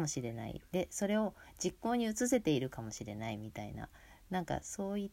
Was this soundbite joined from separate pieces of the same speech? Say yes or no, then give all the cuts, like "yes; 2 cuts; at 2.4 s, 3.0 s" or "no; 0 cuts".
no; 0 cuts